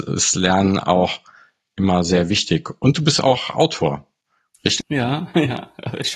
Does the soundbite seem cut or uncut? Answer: cut